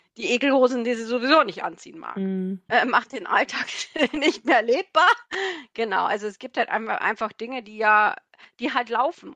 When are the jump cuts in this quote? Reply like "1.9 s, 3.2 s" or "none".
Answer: 2.7 s